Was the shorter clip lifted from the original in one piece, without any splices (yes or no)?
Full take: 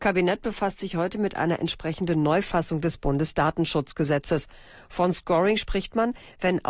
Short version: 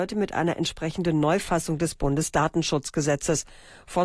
yes